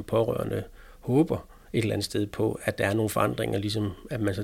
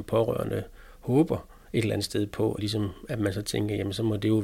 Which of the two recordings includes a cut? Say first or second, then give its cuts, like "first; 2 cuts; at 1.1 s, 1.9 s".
second; 1 cut; at 2.6 s